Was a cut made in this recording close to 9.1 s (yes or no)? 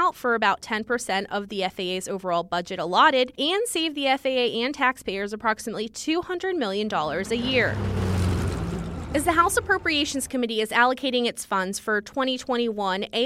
yes